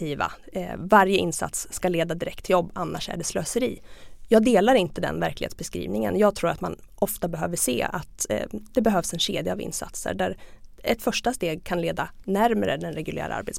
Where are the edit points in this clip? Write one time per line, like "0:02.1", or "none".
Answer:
none